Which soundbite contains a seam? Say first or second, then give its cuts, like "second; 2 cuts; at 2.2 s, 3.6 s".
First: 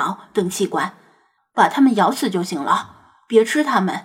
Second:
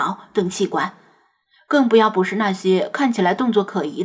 first; 1 cut; at 1.4 s